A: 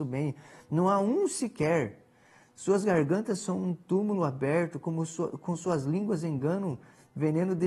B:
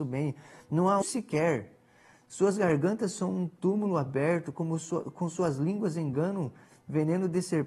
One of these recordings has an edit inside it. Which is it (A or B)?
B